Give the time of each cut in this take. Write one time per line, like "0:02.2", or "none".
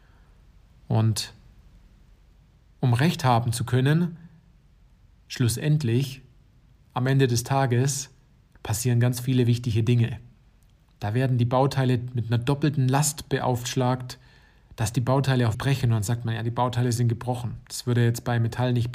0:15.5